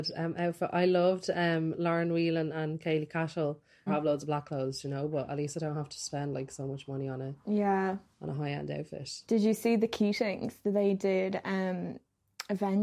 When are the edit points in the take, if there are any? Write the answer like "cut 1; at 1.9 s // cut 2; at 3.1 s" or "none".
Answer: cut 1; at 3.9 s